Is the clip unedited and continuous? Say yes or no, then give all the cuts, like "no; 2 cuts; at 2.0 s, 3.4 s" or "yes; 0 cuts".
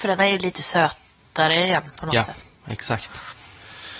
yes; 0 cuts